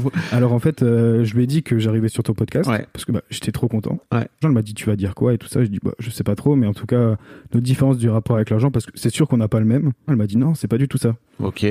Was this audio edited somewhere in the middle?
yes; 2 cuts; at 4.4 s, 10.1 s

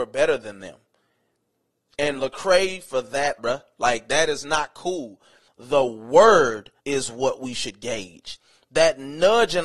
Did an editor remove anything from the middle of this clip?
yes; 3 cuts; at 3.4 s, 5.5 s, 6.8 s

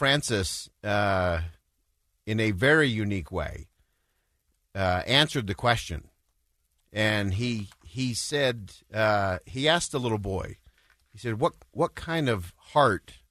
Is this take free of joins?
yes; 0 cuts

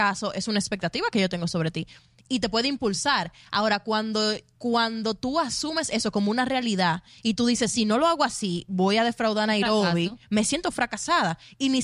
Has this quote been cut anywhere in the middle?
no; 0 cuts

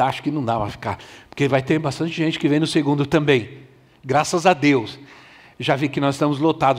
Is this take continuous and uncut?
yes; 0 cuts

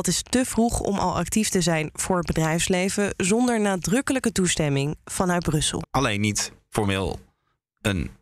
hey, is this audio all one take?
no; 1 cut; at 5.8 s

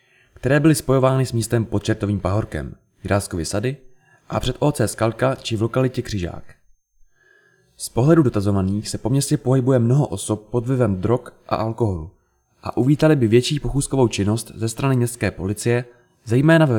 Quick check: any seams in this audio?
no; 0 cuts

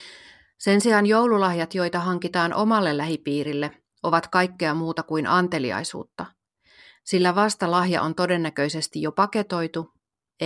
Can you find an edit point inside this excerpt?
no; 0 cuts

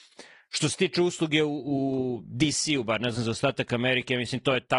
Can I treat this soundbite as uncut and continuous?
yes; 0 cuts

